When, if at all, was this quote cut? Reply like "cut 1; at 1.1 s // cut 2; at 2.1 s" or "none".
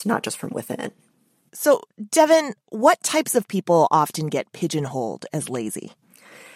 none